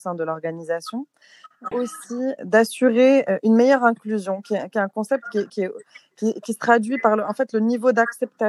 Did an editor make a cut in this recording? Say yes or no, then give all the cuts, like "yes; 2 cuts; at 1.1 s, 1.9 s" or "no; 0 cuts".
yes; 2 cuts; at 1.7 s, 5.5 s